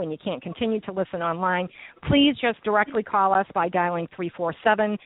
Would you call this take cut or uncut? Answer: uncut